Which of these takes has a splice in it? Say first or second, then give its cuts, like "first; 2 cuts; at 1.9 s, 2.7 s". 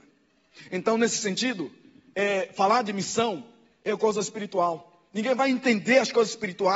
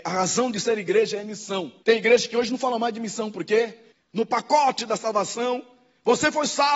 second; 2 cuts; at 1.8 s, 3.9 s